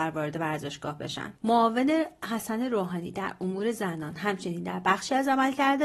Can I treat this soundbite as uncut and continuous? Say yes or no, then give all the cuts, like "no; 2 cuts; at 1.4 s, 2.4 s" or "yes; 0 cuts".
no; 1 cut; at 1.4 s